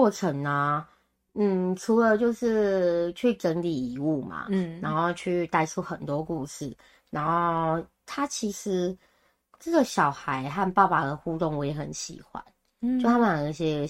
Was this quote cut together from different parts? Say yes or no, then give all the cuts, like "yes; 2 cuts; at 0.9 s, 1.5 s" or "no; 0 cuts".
no; 0 cuts